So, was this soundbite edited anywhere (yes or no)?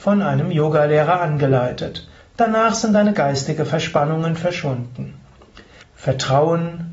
yes